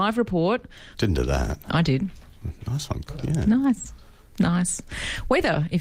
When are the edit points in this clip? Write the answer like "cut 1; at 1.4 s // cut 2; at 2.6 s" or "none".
cut 1; at 0.9 s // cut 2; at 3.1 s